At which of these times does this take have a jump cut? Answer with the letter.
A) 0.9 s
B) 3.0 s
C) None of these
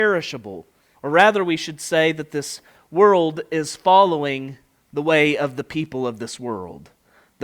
A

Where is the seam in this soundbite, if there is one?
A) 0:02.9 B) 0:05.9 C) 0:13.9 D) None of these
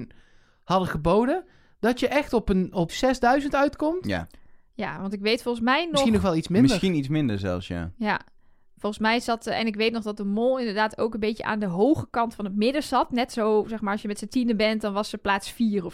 A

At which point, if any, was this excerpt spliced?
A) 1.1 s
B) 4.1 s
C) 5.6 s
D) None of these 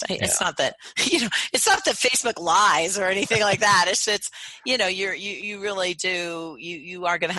B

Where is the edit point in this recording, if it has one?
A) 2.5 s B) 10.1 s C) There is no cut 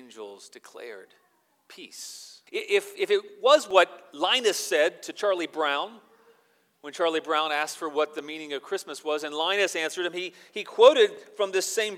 A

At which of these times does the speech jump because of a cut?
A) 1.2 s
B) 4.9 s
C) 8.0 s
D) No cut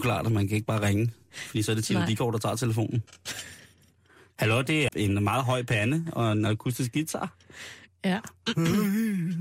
B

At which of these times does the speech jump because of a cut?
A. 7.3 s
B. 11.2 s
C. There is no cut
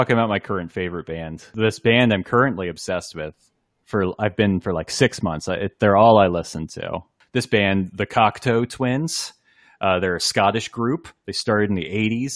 C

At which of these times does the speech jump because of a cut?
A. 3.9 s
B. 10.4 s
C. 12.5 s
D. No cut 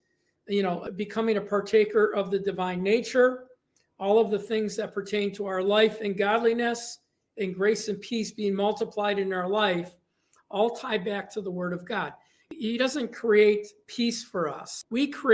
C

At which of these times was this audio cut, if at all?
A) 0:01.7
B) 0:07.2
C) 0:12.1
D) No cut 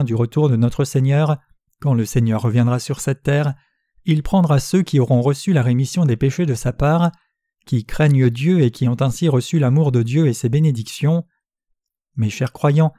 A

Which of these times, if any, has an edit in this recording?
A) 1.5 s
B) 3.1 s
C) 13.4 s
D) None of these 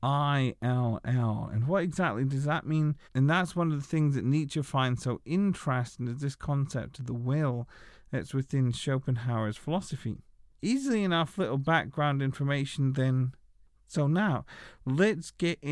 B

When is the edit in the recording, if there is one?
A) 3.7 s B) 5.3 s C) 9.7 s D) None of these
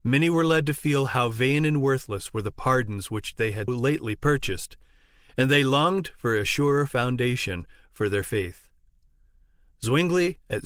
A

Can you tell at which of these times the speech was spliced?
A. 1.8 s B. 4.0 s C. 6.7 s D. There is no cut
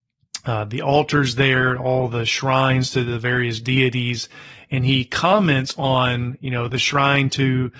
C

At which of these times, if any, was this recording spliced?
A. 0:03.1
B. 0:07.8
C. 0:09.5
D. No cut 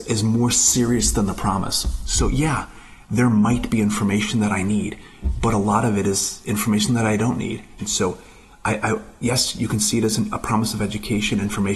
B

